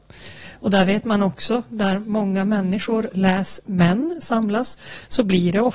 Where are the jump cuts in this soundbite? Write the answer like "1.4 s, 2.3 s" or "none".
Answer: none